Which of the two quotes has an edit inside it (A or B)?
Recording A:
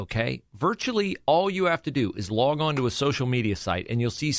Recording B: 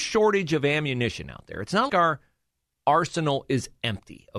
B